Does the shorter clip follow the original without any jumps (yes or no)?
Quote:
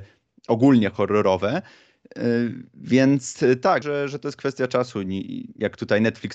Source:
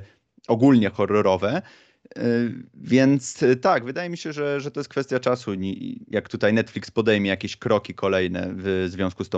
no